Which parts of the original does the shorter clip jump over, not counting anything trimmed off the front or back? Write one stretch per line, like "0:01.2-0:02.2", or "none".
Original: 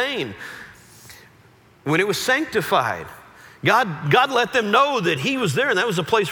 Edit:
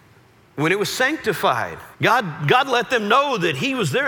0:03.2-0:03.6

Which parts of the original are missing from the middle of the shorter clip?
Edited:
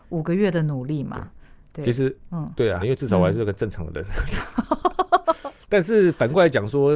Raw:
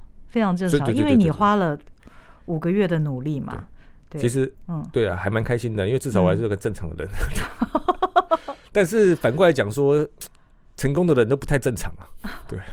0:05.2-0:05.8

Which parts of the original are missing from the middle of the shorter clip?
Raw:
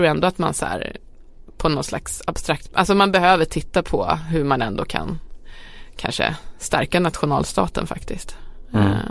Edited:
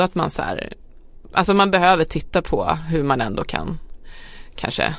0:01.5-0:02.7

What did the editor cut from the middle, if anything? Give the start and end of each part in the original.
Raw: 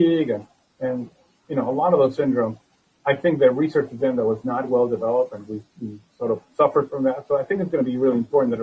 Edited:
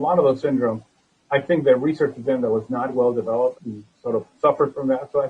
0:05.3-0:05.7

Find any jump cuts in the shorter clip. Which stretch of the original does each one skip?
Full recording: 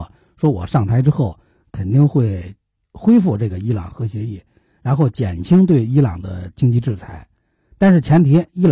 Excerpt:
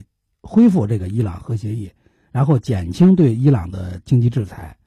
none

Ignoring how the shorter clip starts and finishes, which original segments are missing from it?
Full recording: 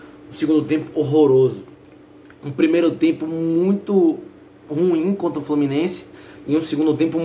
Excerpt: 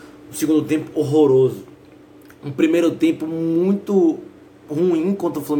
none

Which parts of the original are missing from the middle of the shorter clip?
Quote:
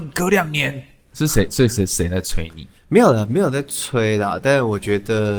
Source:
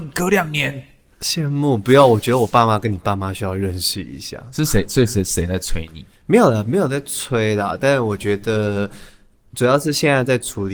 0:01.1-0:04.5

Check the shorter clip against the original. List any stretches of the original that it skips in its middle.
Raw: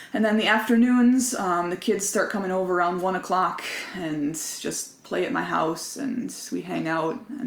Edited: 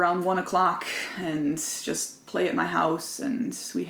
none

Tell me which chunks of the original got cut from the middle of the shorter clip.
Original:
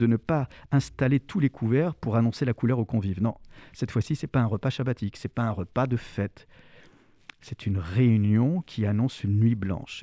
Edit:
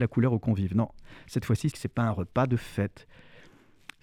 0:04.2-0:05.1

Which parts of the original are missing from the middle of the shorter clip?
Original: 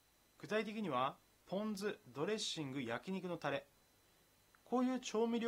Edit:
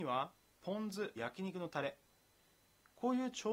0:02.0-0:02.8

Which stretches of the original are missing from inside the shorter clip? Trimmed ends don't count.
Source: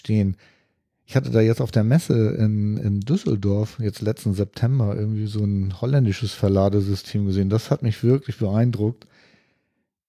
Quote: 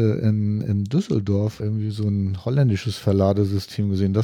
0:03.8-0:05.0

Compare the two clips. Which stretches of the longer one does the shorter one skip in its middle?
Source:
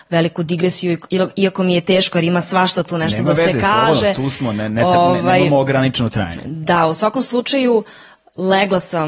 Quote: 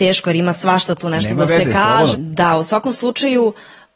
0:04.0-0:06.4

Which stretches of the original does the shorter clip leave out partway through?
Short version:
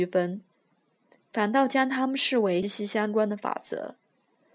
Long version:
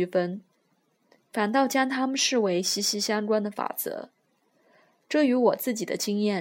0:02.6-0:02.8

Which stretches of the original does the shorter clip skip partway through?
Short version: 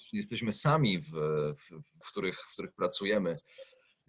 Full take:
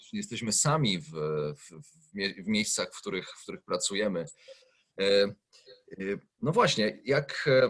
0:02.0-0:02.9

